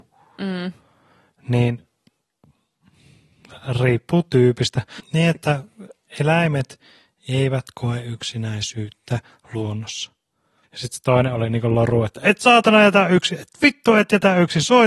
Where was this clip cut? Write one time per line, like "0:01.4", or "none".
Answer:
0:05.0
0:10.6

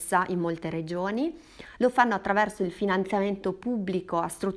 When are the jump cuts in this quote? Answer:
0:01.8

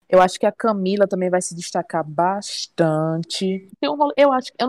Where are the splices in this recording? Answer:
0:03.7

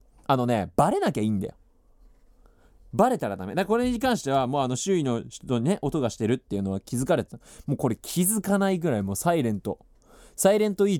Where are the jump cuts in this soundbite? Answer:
none

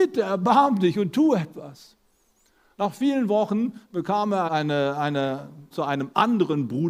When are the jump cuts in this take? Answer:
0:04.5
0:05.7

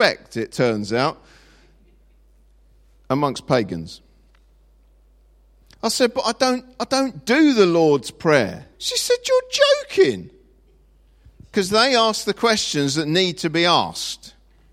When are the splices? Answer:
0:08.7
0:11.2

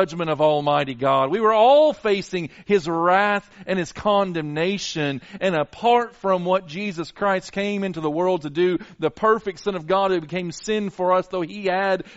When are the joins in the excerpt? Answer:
0:05.4

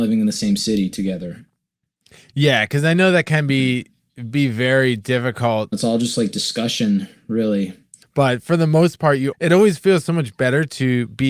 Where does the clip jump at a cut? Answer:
0:05.7
0:08.0
0:09.3

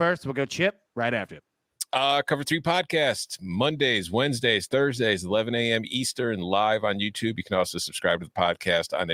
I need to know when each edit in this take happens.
none

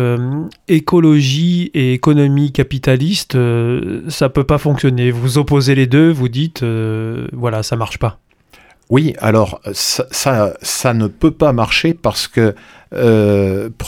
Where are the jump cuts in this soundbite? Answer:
none

